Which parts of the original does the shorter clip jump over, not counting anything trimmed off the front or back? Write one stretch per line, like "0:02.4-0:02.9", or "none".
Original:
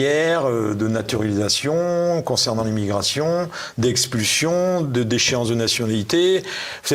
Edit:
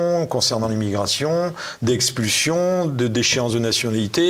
none